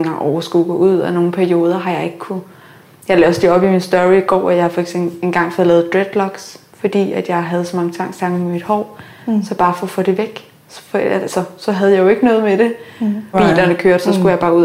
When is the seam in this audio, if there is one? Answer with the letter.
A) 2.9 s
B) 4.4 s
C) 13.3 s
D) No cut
C